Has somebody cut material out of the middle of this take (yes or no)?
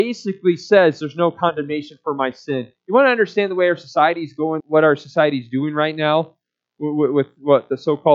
yes